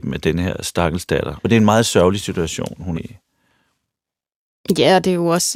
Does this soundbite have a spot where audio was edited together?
yes; 2 cuts; at 1.4 s, 2.9 s

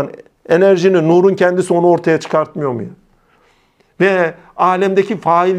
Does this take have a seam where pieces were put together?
no; 0 cuts

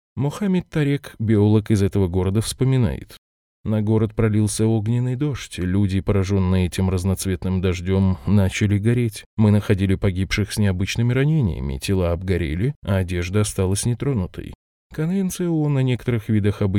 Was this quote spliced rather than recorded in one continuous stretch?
no; 0 cuts

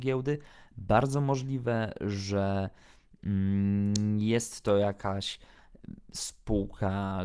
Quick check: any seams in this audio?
no; 0 cuts

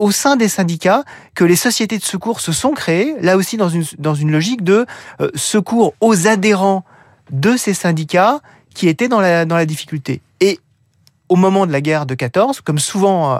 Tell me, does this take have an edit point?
no; 0 cuts

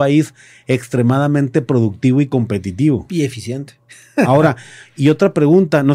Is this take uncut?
yes; 0 cuts

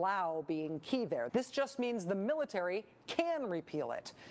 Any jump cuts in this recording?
yes; 1 cut; at 1.3 s

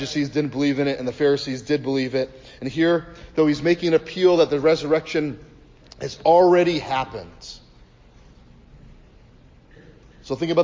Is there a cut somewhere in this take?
no; 0 cuts

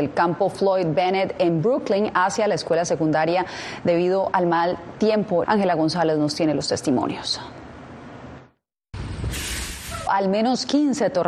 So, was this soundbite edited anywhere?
yes; 2 cuts; at 5.4 s, 10.1 s

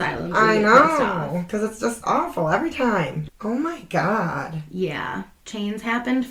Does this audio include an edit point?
yes; 1 cut; at 3.3 s

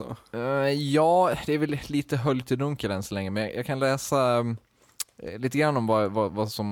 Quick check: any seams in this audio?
no; 0 cuts

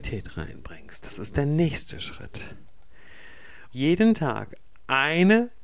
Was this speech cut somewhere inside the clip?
yes; 1 cut; at 3.7 s

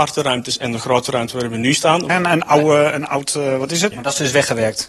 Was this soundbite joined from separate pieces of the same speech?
yes; 2 cuts; at 2.1 s, 3.9 s

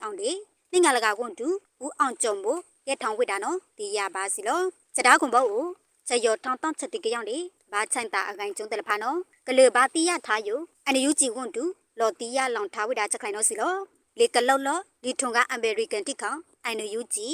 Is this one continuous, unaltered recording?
yes; 0 cuts

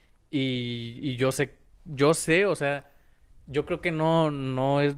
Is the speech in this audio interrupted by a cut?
no; 0 cuts

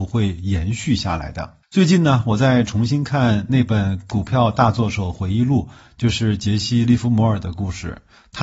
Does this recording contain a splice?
no; 0 cuts

